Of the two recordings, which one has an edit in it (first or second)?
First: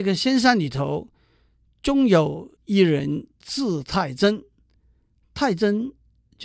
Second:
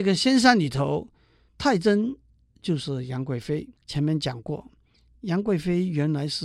second